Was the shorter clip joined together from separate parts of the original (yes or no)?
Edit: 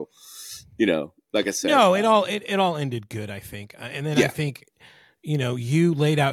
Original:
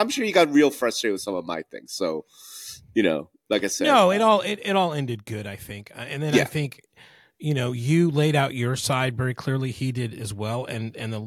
no